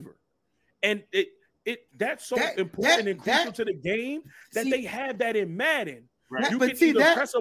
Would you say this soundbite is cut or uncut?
cut